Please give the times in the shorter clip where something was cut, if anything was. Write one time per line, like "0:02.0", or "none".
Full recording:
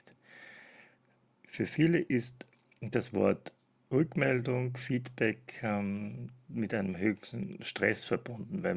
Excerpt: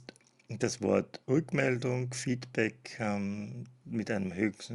0:01.2

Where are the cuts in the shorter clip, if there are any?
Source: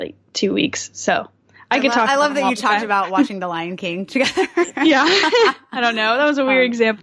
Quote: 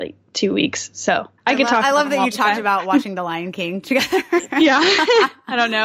0:01.4

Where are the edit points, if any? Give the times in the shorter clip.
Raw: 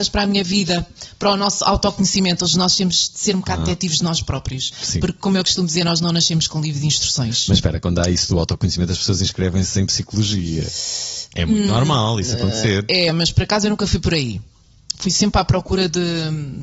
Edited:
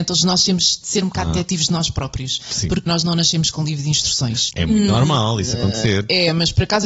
0:02.9
0:04.5

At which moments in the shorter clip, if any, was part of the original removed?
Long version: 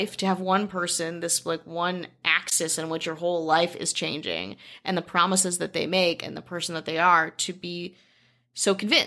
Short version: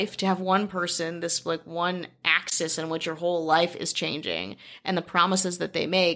none

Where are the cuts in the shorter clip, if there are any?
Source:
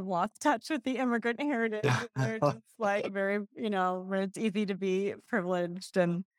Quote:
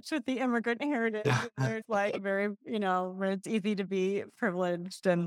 0:01.8

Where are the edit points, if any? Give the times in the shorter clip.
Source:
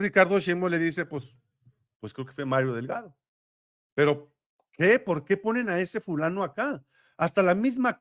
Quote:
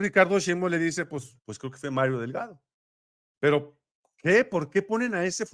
0:01.4

